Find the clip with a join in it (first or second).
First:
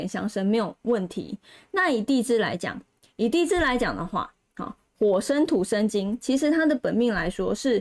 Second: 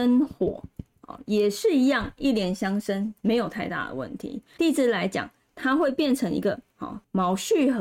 second